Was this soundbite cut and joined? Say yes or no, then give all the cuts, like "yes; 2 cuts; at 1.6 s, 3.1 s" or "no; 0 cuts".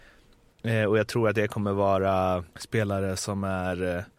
yes; 1 cut; at 2.5 s